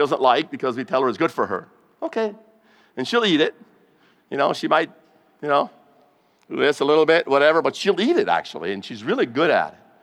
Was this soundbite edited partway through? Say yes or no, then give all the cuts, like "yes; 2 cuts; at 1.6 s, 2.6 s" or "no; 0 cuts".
no; 0 cuts